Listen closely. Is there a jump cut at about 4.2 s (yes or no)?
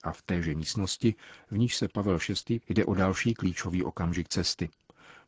no